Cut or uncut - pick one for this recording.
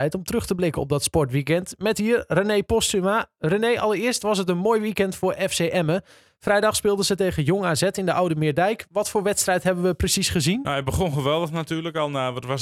uncut